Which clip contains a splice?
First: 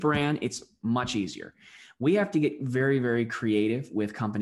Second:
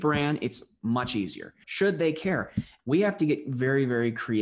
second; 2 cuts; at 1.6 s, 2.8 s

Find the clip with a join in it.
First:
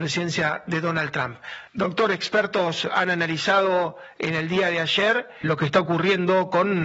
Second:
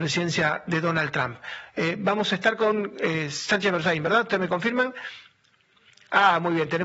first; 2 cuts; at 1.7 s, 5.4 s

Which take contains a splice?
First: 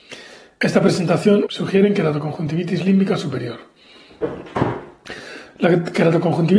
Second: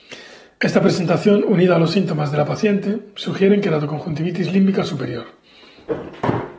first; 1 cut; at 1.5 s

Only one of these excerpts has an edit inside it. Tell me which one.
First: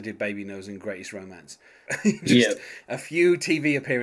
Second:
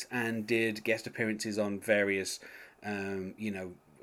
first; 1 cut; at 1.9 s

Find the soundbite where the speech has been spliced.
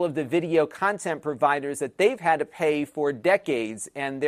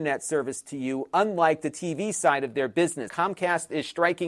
second; 1 cut; at 3.1 s

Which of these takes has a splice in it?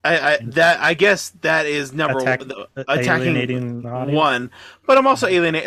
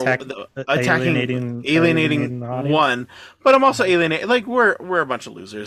first; 1 cut; at 3.8 s

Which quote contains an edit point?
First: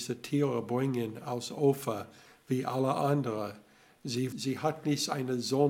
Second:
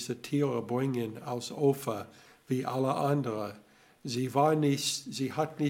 first; 1 cut; at 4.3 s

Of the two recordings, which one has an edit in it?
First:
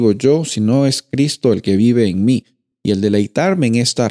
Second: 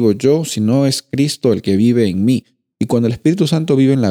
second; 1 cut; at 2.7 s

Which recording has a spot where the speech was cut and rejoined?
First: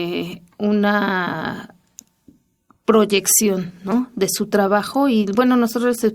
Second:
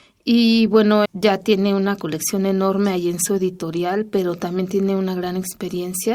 second; 1 cut; at 1.0 s

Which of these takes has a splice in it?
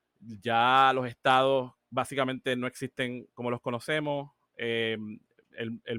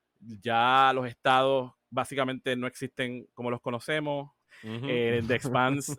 second; 1 cut; at 4.4 s

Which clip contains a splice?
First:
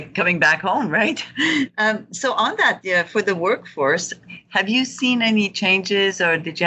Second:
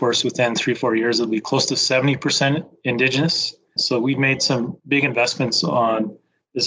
second; 1 cut; at 3.8 s

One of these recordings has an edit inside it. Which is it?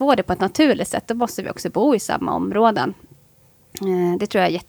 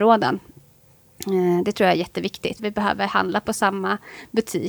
second; 1 cut; at 2.6 s

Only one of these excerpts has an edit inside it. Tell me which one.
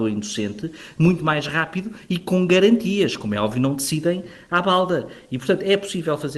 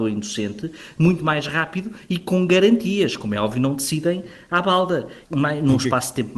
second; 1 cut; at 5.2 s

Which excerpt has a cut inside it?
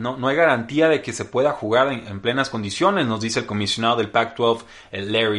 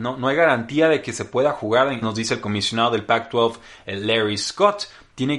second; 1 cut; at 2.0 s

